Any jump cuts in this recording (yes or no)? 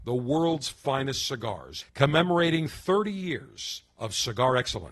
yes